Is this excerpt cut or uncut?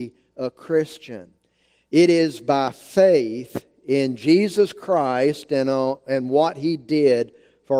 cut